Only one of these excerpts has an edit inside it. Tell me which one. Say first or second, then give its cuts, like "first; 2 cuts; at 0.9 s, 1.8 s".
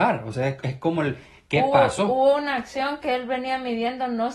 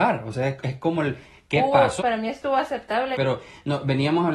second; 2 cuts; at 2.0 s, 3.1 s